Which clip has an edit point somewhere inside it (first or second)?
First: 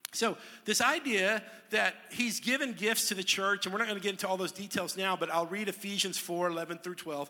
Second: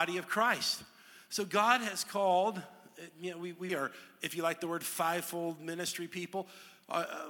second